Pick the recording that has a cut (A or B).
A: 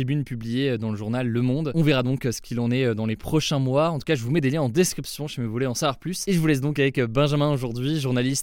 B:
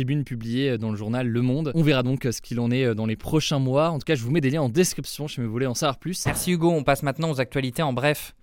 B